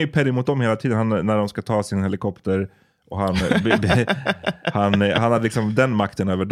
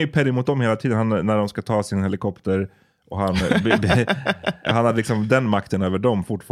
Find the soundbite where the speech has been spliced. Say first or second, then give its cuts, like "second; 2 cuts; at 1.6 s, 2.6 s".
second; 1 cut; at 4.7 s